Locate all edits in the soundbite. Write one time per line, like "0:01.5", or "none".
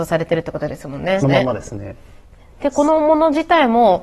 0:01.2